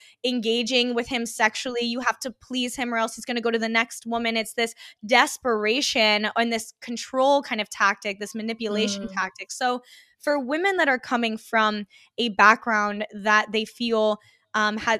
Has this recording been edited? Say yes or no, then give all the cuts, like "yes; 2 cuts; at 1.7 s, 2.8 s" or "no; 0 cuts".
no; 0 cuts